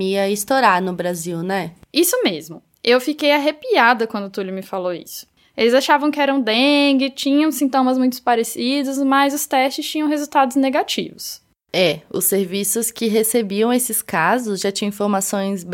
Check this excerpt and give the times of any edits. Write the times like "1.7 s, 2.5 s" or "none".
5.4 s

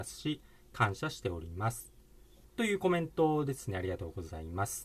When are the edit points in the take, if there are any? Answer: 2.4 s

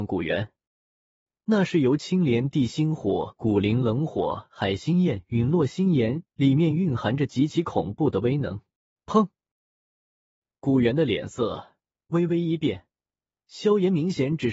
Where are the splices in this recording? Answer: 6.2 s, 9.0 s

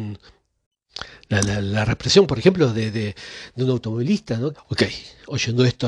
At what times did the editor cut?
4.5 s

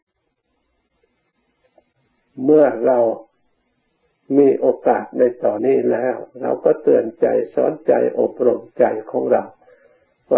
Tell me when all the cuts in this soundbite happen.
5.6 s

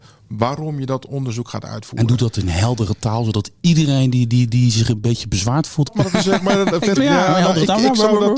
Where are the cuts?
5.9 s, 7.0 s

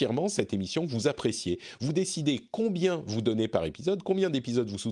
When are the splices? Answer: none

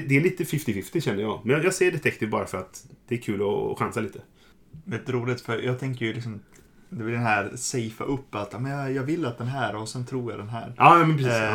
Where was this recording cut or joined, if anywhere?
none

